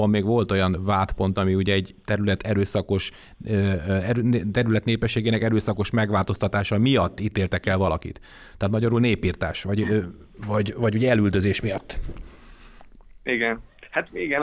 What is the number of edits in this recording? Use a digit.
0